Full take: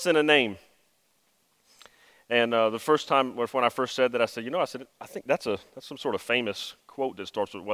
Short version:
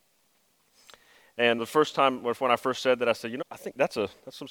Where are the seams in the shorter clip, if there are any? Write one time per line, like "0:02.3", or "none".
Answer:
0:01.6
0:03.4